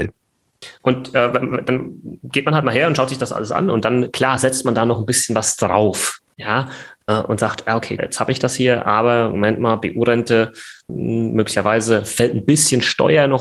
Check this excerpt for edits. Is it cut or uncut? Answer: cut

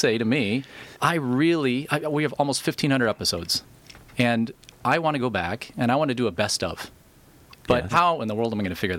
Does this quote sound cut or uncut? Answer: cut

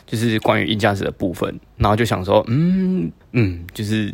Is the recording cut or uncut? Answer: cut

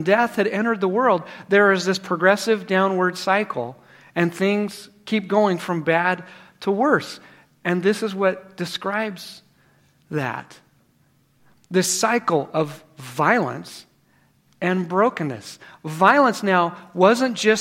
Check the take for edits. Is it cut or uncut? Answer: uncut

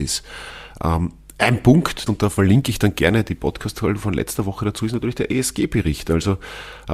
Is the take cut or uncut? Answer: cut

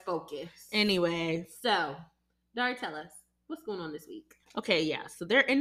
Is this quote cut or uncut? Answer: cut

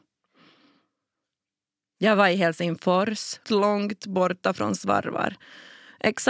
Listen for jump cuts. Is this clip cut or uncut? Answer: cut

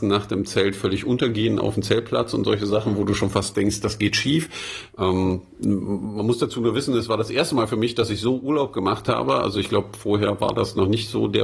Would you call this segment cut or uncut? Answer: cut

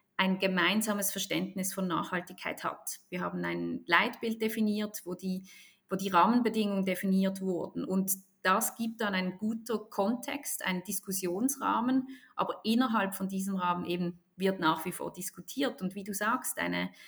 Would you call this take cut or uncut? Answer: uncut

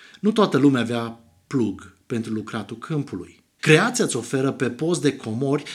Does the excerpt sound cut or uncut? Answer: cut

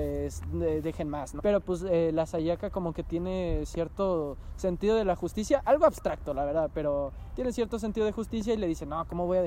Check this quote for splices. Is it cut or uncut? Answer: cut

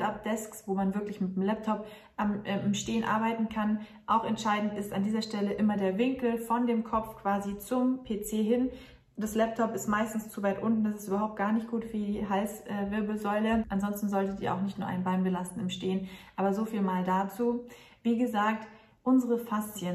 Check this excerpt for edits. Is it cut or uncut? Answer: uncut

